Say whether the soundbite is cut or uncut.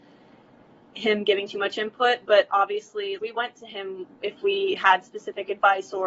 cut